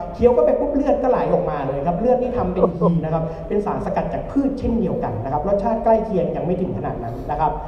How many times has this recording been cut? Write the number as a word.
one